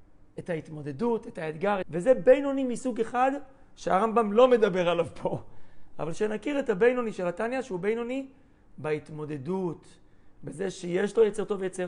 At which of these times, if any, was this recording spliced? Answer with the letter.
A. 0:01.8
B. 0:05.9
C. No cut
A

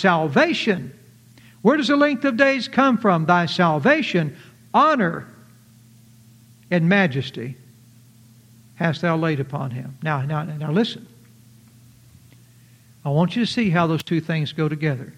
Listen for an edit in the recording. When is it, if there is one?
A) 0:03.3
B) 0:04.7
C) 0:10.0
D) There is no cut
D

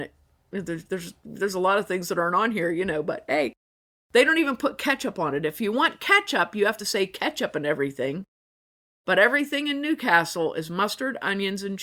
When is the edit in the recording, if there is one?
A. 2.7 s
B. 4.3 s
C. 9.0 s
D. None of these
D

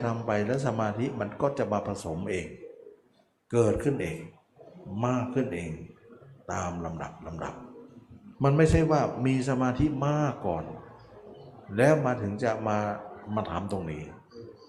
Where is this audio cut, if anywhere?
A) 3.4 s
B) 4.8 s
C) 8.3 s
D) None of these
C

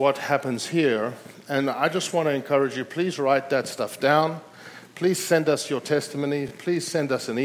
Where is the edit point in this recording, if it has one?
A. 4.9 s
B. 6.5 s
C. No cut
C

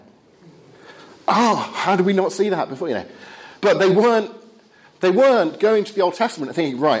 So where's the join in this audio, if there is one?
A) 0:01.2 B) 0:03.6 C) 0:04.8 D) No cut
B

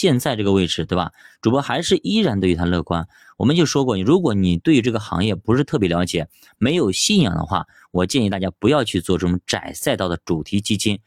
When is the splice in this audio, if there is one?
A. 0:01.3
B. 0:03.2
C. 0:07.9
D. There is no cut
D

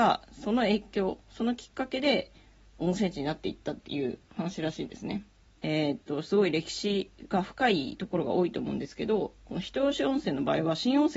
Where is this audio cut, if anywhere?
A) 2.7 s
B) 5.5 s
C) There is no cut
B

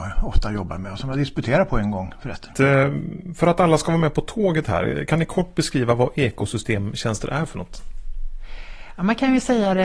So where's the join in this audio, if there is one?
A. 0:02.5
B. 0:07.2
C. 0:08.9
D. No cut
A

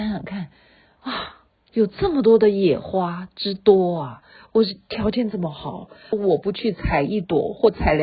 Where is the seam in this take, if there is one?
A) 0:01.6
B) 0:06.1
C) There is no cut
B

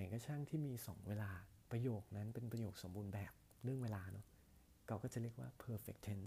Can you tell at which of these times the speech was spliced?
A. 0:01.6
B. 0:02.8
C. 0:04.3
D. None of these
A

